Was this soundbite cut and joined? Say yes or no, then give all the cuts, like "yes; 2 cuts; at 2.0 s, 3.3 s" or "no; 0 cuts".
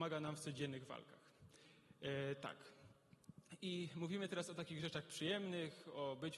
no; 0 cuts